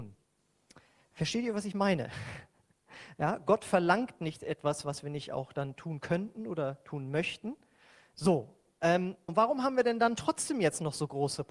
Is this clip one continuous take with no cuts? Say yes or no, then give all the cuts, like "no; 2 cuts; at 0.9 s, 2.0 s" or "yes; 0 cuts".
no; 2 cuts; at 8.1 s, 9.3 s